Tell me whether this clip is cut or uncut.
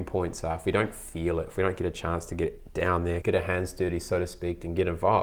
cut